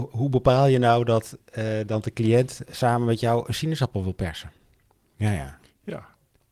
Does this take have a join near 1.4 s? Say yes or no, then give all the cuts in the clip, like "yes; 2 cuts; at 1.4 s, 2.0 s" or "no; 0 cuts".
no; 2 cuts; at 2.7 s, 5.1 s